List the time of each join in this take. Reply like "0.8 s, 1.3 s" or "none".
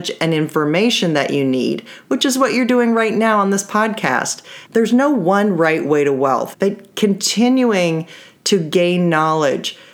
4.6 s, 6.5 s